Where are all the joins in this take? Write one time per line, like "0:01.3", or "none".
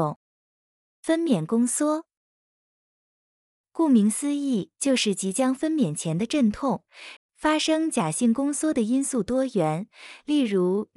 0:07.2